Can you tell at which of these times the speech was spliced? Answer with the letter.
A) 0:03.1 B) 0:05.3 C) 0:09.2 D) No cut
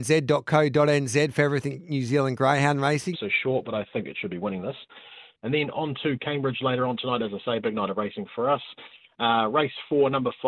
A